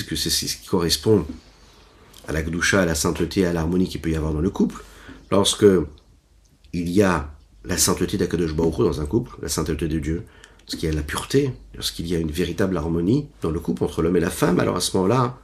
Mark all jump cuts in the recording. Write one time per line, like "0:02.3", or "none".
0:13.3